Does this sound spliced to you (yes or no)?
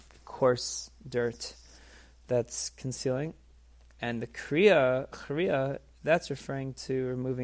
no